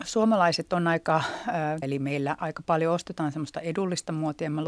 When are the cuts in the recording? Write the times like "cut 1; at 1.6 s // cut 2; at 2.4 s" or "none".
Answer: cut 1; at 1.8 s